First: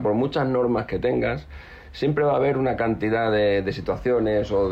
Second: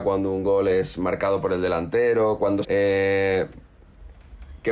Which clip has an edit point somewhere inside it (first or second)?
second